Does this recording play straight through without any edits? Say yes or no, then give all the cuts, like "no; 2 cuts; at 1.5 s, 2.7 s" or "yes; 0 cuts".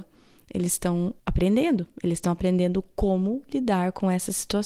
no; 1 cut; at 1.2 s